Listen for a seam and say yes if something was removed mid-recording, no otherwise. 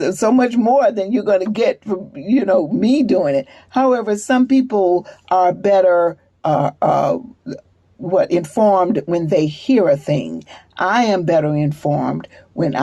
no